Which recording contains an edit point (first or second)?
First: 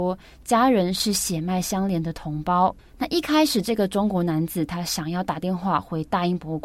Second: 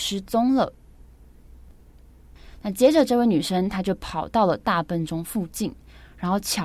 first